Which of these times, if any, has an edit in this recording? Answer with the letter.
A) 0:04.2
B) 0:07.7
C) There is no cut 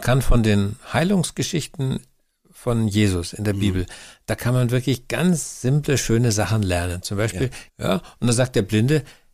B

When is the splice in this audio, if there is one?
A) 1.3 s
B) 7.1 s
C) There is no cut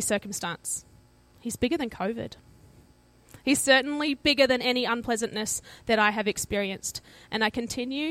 C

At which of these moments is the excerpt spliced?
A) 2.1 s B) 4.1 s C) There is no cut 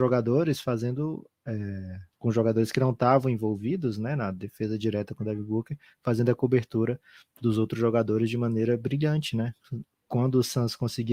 A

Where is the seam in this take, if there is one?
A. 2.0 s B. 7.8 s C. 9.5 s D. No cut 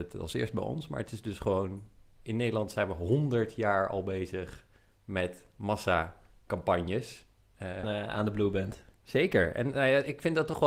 B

